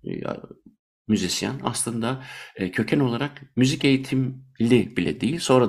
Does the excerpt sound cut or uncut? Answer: uncut